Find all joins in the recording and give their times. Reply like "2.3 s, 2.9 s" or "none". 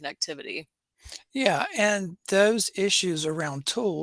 none